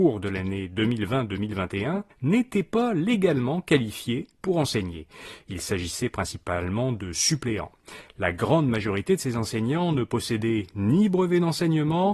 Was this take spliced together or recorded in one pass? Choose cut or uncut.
cut